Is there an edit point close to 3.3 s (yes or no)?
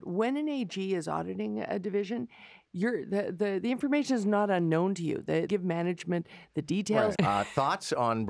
no